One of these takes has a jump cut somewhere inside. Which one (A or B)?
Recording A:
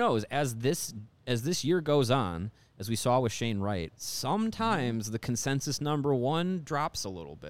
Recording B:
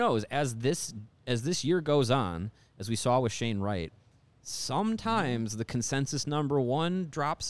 A